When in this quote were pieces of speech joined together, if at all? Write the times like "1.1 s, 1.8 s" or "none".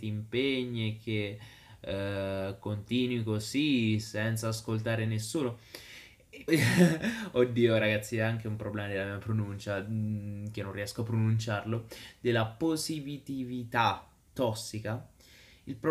6.5 s